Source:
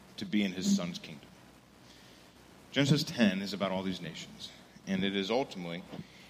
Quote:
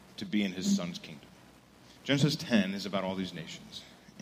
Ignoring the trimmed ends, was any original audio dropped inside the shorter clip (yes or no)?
yes